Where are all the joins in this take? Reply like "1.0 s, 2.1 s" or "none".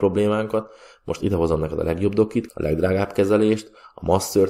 2.5 s